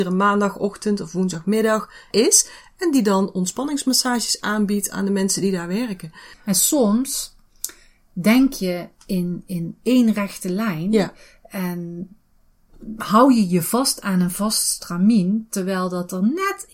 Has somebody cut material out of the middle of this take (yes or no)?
yes